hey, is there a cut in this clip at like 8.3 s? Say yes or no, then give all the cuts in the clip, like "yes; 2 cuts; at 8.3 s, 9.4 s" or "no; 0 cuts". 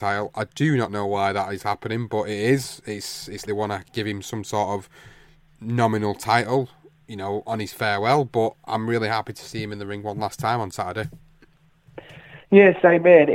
no; 1 cut; at 3.5 s